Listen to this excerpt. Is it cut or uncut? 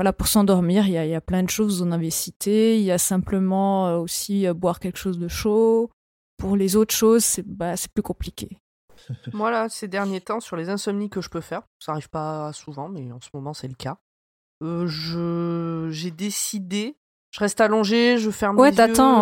cut